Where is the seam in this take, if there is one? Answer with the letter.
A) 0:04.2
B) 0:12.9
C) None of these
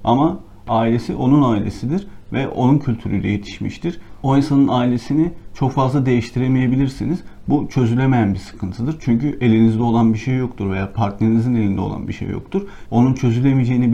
B